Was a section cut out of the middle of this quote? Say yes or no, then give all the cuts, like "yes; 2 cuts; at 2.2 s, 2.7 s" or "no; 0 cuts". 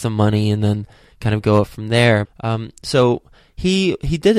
yes; 1 cut; at 2.2 s